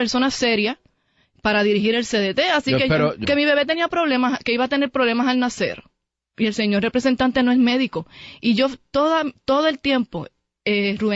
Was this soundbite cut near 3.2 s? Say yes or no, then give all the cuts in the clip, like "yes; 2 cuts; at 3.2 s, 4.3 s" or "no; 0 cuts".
yes; 1 cut; at 3.2 s